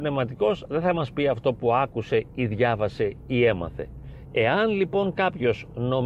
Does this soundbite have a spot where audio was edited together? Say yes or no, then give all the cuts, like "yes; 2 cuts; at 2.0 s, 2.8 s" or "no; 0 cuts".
yes; 1 cut; at 4.2 s